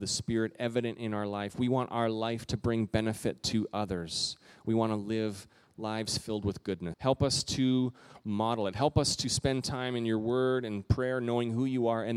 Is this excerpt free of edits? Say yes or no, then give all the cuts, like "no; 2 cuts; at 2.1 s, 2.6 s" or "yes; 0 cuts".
no; 1 cut; at 6.9 s